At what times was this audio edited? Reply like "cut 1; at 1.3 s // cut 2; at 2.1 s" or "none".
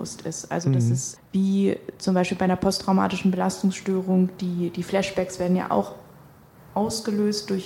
cut 1; at 1.2 s